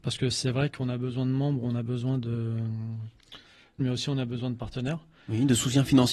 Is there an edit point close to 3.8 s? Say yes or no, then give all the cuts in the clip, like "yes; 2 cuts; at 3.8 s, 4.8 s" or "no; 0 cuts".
yes; 1 cut; at 3.8 s